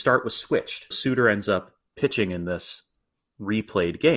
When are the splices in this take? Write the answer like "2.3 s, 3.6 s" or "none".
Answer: 0.9 s